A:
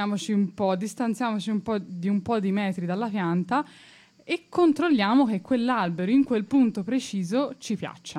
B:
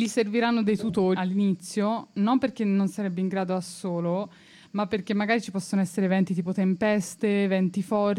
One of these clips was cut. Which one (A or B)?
B